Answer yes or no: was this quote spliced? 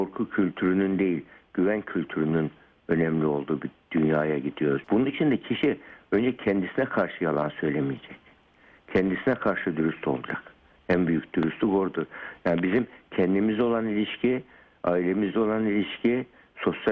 yes